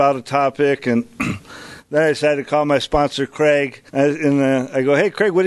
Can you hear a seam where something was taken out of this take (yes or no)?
yes